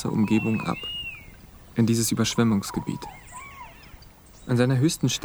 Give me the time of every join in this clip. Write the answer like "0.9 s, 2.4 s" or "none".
4.3 s